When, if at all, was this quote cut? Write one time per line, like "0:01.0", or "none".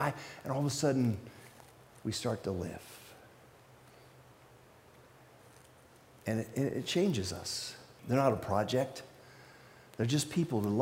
0:08.0

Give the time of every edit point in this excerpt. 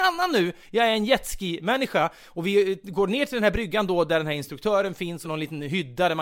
0:05.2

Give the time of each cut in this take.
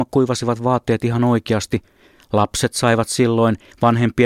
none

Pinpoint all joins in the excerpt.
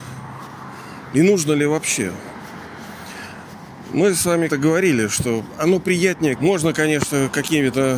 0:04.5
0:06.4

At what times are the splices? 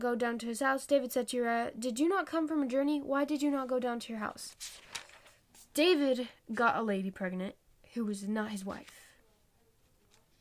0:05.7

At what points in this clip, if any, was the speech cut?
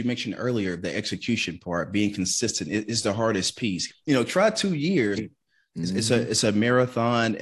0:03.9
0:05.2

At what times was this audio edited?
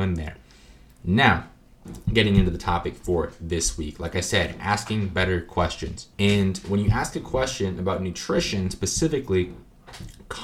0:06.1

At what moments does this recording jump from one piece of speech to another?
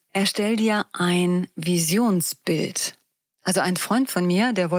none

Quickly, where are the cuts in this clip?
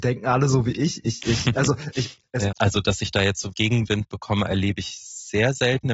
0:02.5
0:03.5

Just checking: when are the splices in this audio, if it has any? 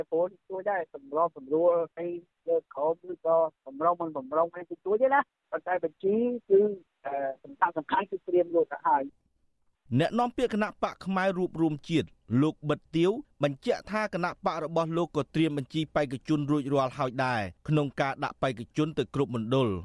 none

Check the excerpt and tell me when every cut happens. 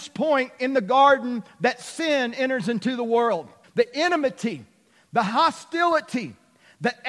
0:03.6

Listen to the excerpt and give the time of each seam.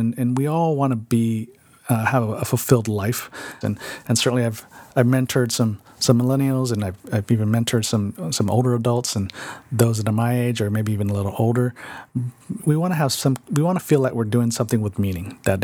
0:03.6
0:12.6

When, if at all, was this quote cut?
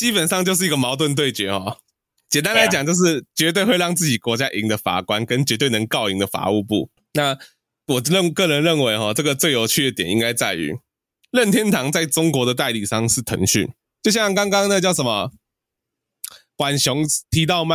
0:13.8

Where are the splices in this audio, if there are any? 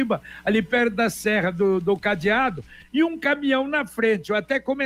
none

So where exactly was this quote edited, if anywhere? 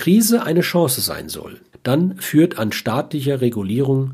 0:01.7

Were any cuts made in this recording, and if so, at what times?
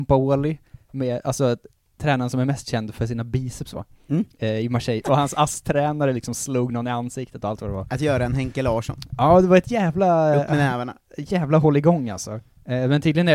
0:05.0

